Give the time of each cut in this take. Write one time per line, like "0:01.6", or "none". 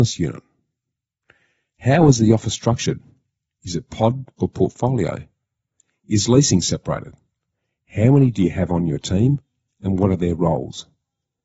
0:04.4